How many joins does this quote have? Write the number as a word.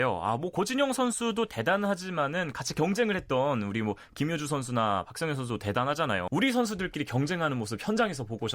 one